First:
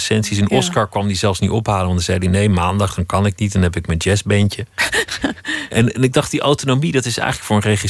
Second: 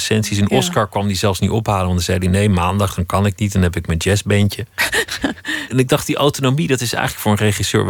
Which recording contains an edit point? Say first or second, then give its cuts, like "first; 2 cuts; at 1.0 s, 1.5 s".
second; 1 cut; at 5.7 s